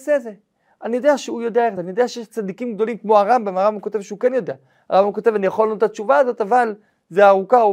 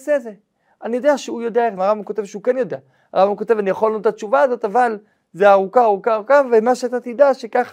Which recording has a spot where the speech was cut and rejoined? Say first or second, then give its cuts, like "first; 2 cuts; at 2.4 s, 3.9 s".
second; 1 cut; at 1.8 s